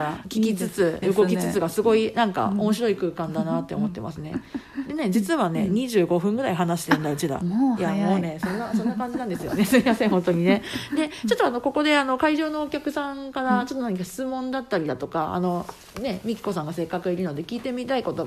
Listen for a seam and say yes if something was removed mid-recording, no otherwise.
yes